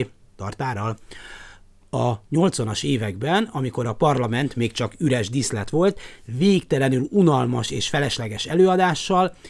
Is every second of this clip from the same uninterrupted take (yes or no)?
yes